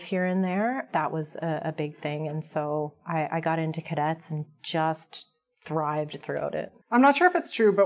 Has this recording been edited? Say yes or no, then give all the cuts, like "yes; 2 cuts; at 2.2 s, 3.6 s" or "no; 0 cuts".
yes; 1 cut; at 6.8 s